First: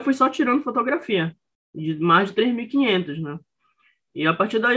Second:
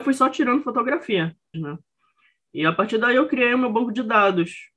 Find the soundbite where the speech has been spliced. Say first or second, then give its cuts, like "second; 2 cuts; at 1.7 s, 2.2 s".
second; 1 cut; at 1.5 s